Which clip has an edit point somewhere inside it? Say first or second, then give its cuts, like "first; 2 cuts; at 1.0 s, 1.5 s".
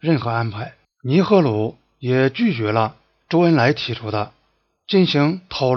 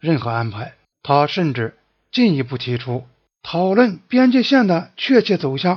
second; 1 cut; at 0.9 s